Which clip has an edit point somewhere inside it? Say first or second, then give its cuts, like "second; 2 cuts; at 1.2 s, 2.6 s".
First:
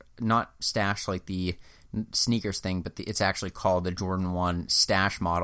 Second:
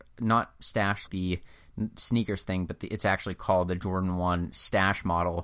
second; 1 cut; at 1.1 s